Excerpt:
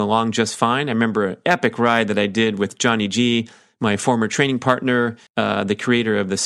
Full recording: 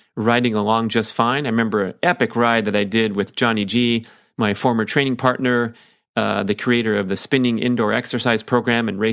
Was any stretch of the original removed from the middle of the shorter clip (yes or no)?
yes